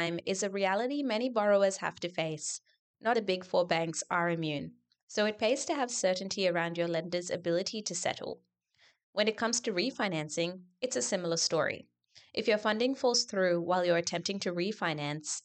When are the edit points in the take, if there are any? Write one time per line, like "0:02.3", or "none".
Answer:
0:03.1